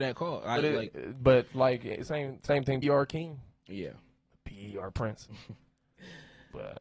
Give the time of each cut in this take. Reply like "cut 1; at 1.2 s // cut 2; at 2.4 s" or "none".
cut 1; at 2.8 s // cut 2; at 4.3 s